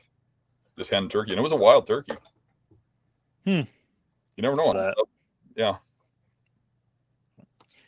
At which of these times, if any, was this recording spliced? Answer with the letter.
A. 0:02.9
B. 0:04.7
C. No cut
B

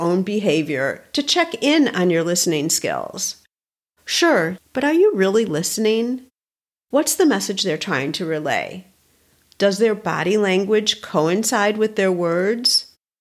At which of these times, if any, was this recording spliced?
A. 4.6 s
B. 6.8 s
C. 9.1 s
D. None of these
A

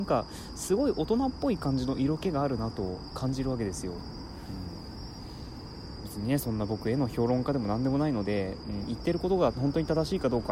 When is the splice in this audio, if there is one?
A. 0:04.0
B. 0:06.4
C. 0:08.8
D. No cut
D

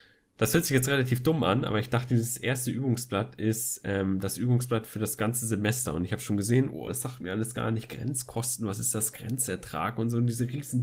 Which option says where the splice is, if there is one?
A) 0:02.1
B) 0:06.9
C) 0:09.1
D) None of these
B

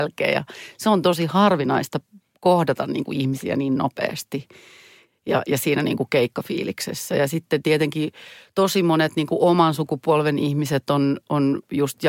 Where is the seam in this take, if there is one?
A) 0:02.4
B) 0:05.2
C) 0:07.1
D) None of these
D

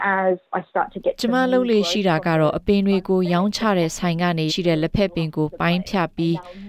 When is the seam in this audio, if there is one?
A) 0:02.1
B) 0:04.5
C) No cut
B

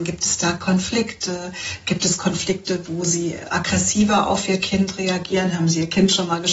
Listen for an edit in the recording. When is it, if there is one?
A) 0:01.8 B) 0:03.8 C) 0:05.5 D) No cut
D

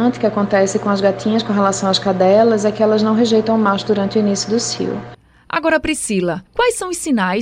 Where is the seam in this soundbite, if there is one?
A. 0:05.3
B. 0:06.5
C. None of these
B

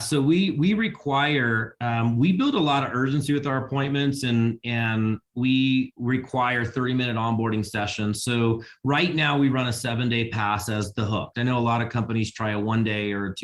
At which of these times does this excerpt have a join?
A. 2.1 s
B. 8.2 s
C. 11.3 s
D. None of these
C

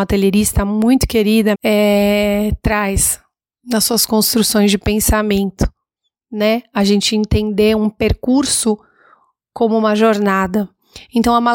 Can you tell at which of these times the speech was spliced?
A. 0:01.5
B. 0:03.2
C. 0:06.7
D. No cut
A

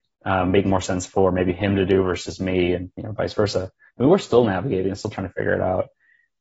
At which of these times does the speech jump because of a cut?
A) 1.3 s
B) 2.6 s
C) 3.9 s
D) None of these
C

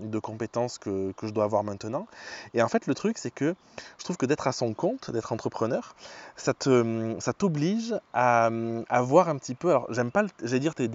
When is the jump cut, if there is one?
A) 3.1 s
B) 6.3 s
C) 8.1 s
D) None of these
D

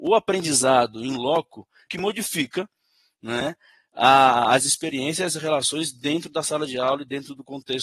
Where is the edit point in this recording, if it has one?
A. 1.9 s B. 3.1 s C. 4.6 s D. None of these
A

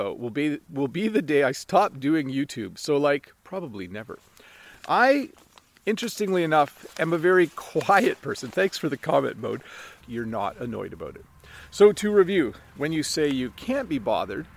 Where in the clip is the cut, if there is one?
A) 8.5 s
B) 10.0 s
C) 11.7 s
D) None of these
B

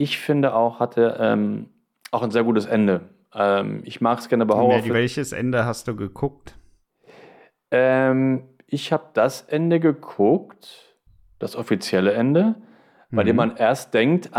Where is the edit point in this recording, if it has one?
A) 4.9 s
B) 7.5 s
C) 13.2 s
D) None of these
A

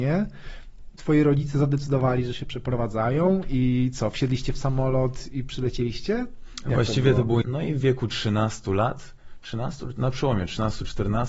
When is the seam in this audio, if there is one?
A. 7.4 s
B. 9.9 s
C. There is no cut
A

